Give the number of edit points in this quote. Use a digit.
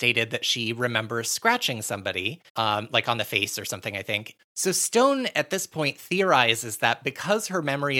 2